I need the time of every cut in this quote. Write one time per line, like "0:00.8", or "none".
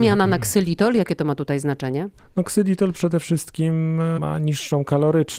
none